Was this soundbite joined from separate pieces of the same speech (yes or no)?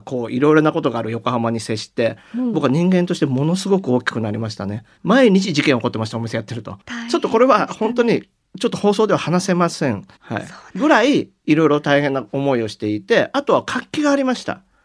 yes